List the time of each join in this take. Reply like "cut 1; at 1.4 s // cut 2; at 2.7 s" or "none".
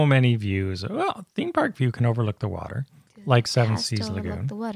none